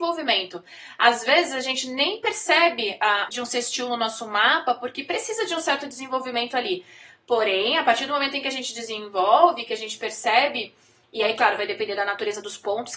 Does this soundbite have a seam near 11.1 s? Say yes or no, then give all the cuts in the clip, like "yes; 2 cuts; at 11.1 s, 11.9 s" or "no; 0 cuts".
no; 1 cut; at 3.3 s